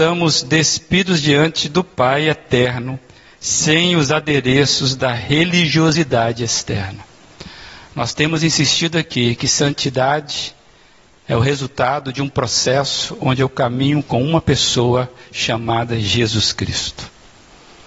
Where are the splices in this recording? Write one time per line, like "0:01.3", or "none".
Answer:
none